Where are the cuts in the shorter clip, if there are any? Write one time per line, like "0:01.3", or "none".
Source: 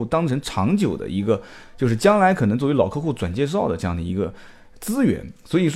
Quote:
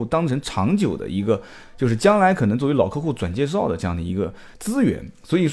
0:04.5